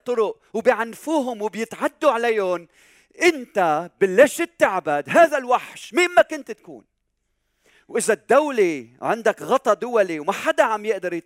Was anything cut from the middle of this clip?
no; 0 cuts

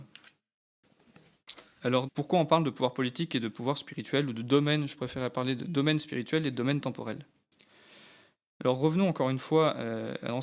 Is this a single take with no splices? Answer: no; 1 cut; at 2.1 s

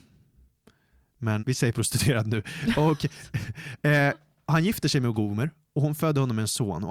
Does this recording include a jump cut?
yes; 1 cut; at 1.4 s

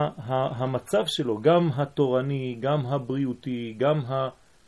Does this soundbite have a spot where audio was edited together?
no; 0 cuts

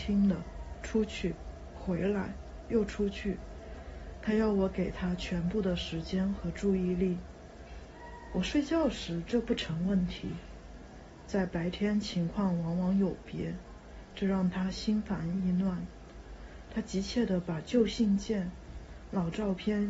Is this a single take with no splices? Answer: yes; 0 cuts

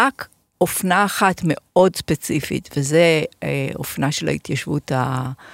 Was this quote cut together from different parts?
no; 0 cuts

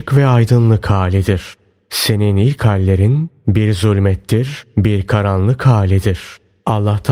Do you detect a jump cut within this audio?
no; 0 cuts

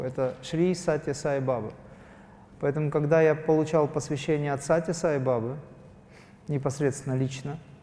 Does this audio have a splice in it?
no; 0 cuts

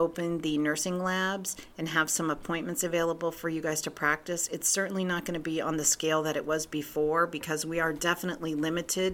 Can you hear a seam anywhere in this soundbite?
no; 0 cuts

